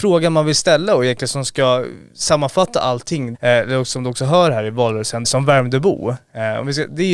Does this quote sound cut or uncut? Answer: cut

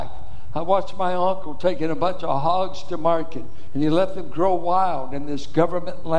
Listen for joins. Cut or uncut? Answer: uncut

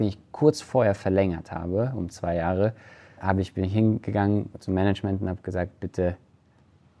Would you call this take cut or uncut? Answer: cut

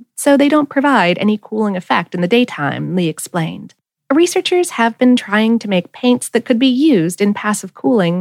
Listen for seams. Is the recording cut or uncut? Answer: cut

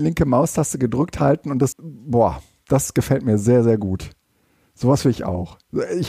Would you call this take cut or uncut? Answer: cut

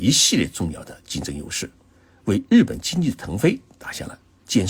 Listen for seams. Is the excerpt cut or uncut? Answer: uncut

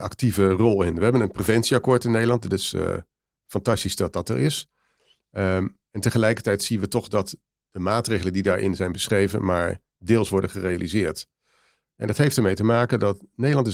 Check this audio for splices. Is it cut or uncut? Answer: uncut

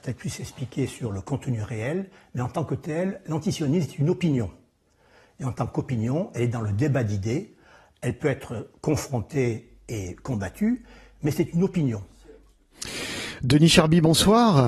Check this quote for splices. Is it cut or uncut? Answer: uncut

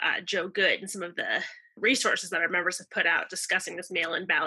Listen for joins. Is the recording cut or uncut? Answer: uncut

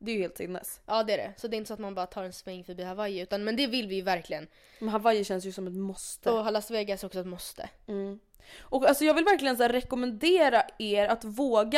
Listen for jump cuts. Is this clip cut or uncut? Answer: uncut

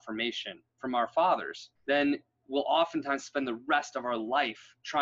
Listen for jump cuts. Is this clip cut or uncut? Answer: cut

